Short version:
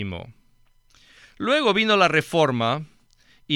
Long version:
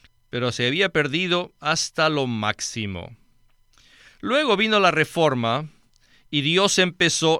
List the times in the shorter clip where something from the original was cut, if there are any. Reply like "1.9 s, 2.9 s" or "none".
none